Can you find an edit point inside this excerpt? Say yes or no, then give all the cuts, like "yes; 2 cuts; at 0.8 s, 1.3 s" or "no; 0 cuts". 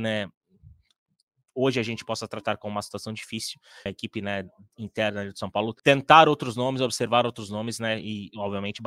yes; 2 cuts; at 3.9 s, 5.8 s